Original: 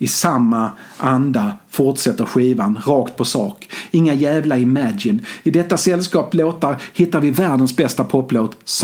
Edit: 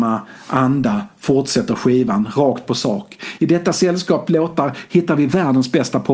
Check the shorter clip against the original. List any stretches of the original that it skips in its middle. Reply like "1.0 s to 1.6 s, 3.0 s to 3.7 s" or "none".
3.9 s to 5.4 s